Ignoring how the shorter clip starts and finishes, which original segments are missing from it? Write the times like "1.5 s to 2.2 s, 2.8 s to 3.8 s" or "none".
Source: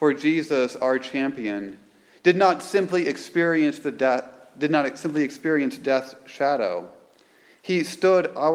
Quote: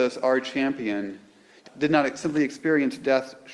2.2 s to 4.4 s